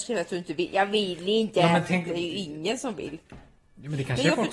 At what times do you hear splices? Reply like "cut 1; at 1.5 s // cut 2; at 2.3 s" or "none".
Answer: none